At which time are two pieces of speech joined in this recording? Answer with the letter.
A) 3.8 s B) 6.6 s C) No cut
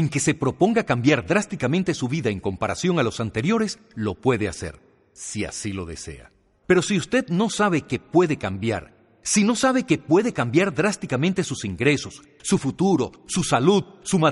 B